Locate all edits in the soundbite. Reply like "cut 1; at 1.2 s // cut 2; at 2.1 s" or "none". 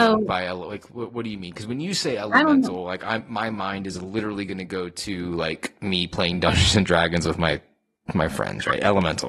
none